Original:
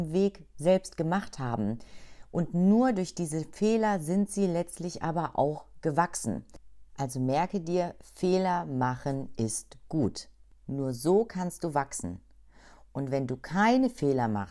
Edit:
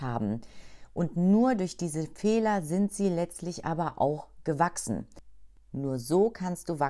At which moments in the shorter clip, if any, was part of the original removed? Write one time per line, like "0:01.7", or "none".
0:05.5

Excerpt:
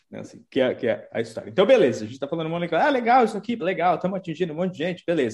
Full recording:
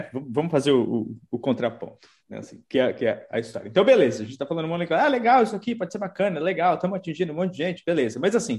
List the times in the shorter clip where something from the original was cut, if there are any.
0:03.6

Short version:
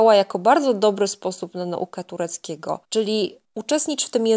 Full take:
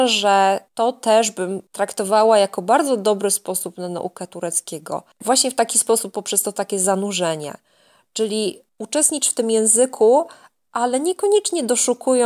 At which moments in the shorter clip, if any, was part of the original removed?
0:02.8

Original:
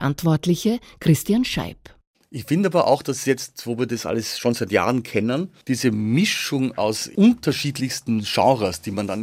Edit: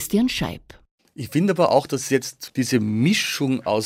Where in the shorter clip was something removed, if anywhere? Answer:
0:02.5

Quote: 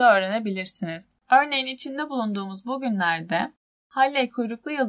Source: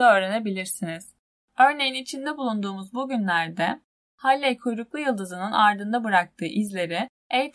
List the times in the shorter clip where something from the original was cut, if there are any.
0:01.2

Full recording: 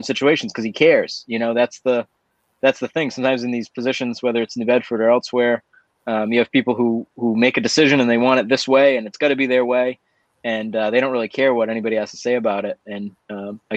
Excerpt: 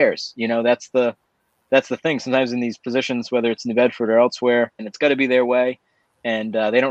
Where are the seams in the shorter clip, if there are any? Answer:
0:04.8

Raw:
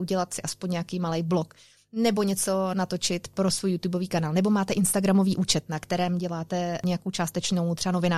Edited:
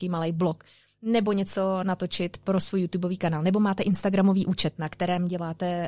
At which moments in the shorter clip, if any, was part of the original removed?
none

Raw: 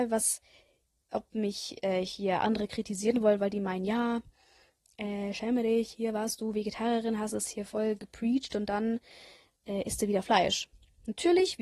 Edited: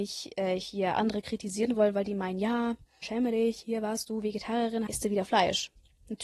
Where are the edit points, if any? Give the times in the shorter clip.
0:03.0
0:04.9

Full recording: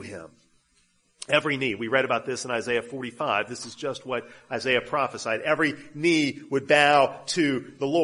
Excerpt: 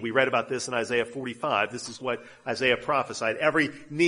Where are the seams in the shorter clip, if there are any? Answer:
0:02.0

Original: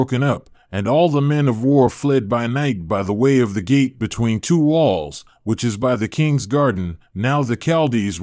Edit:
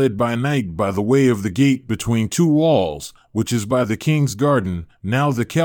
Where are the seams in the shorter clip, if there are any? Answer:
none

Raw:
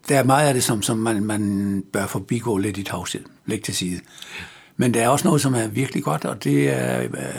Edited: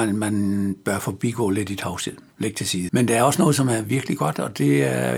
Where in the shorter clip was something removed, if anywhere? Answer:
0:02.9

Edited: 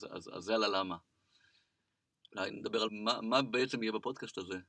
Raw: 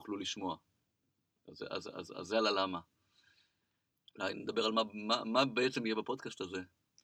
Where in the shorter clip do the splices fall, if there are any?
0:02.9

